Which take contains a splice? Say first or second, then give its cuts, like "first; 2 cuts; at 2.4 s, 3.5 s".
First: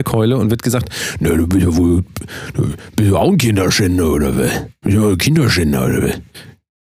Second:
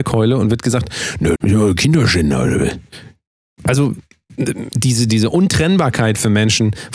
second; 2 cuts; at 1.3 s, 5.1 s